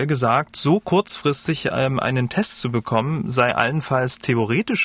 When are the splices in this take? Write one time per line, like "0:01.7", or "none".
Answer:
none